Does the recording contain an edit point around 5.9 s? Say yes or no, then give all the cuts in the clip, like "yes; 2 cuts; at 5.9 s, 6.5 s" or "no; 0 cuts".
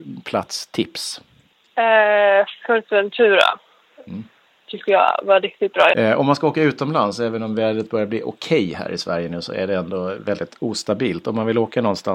yes; 1 cut; at 5.9 s